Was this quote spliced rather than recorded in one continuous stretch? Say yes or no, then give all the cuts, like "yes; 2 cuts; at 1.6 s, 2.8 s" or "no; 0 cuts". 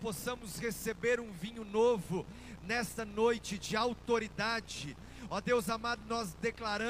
no; 0 cuts